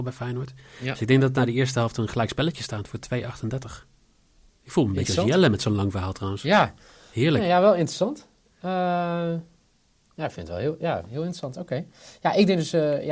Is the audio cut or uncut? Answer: cut